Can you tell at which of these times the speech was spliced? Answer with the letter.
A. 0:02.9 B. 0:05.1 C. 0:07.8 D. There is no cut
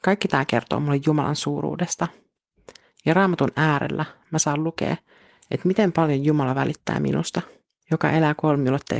C